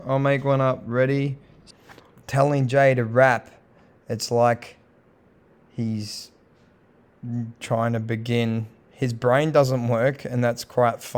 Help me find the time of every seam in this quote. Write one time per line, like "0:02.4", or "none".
0:02.2

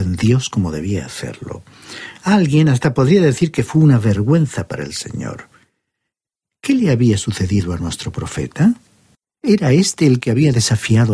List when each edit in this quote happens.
none

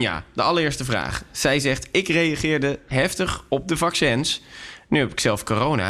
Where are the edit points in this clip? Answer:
none

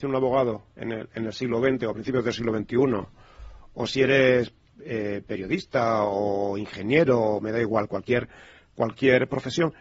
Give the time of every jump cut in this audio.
none

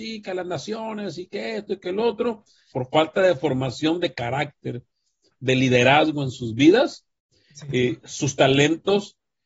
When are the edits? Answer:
0:02.7

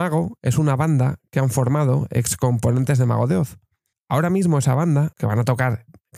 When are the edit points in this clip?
0:03.9
0:05.1

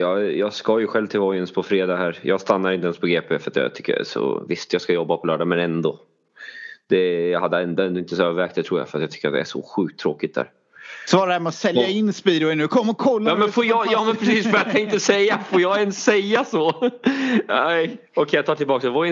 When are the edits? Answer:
none

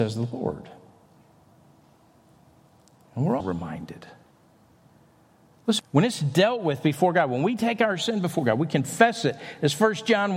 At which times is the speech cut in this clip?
0:03.4
0:05.8

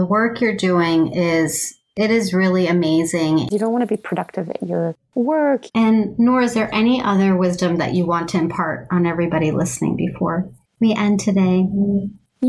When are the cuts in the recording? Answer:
0:03.5
0:05.7

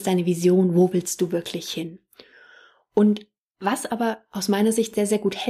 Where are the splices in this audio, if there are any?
none

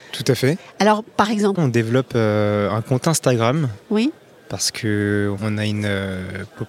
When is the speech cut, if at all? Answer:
0:01.6

